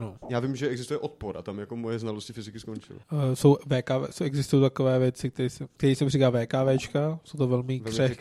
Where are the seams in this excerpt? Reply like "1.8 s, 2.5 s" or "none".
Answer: 3.0 s